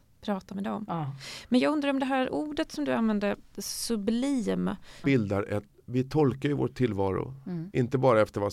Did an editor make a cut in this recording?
yes; 2 cuts; at 3.5 s, 5.0 s

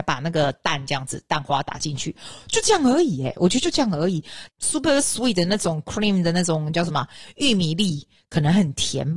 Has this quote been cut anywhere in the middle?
yes; 1 cut; at 4.5 s

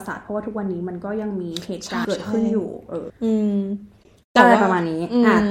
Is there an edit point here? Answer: yes; 2 cuts; at 2.0 s, 3.1 s

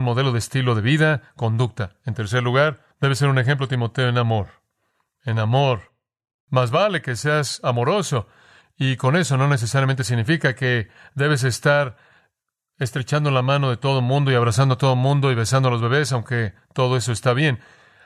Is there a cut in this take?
yes; 1 cut; at 2.9 s

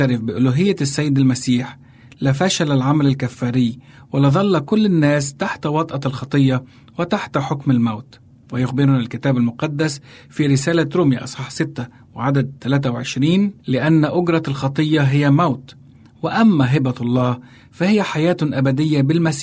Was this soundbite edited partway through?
yes; 2 cuts; at 8.4 s, 13.6 s

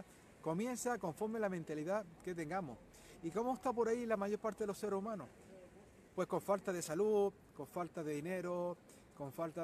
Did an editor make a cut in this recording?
no; 0 cuts

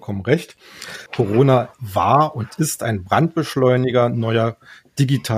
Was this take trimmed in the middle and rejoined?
yes; 1 cut; at 1.1 s

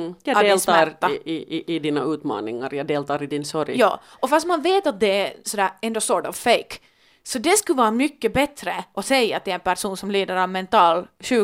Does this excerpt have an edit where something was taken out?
no; 0 cuts

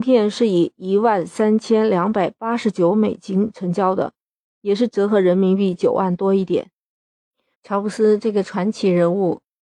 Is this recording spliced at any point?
yes; 1 cut; at 7.5 s

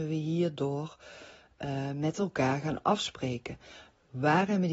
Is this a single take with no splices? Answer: yes; 0 cuts

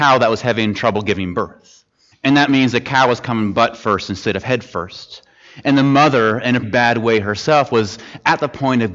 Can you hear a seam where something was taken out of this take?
yes; 2 cuts; at 2.1 s, 6.6 s

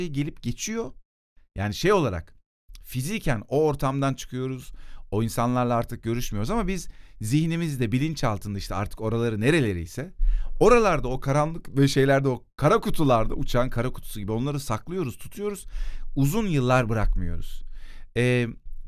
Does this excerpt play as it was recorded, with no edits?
yes; 0 cuts

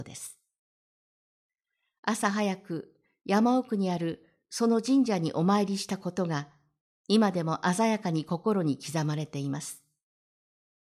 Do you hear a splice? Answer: no; 0 cuts

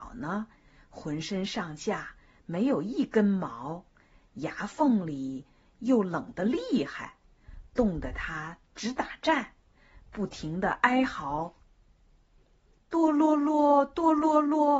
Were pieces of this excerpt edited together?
no; 0 cuts

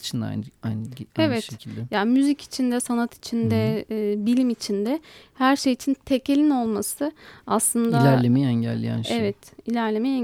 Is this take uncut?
yes; 0 cuts

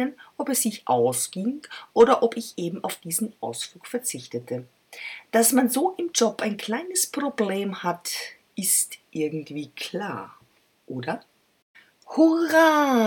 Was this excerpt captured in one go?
yes; 0 cuts

